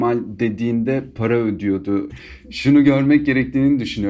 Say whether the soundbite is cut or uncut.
cut